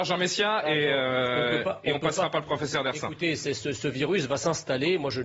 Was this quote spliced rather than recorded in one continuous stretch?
no; 0 cuts

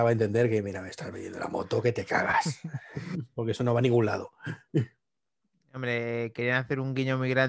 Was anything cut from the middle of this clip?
no; 0 cuts

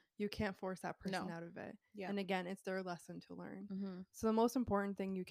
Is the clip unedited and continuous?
yes; 0 cuts

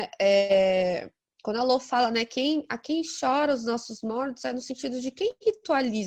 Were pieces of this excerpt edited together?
no; 0 cuts

